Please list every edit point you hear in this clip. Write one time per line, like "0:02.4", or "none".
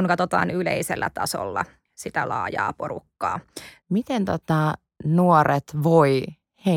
0:03.8

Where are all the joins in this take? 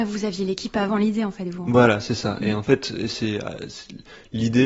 none

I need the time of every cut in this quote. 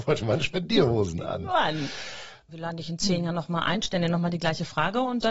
0:02.5

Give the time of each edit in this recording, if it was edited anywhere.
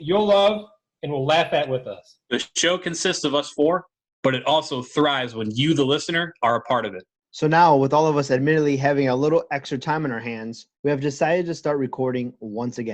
0:07.2
0:10.7

